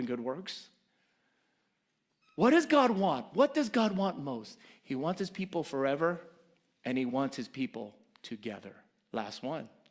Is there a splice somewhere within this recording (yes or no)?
no